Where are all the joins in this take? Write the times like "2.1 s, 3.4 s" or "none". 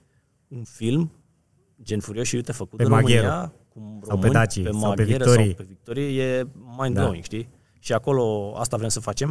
none